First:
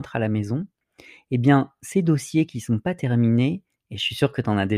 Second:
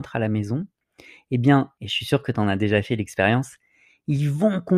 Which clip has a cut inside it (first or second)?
second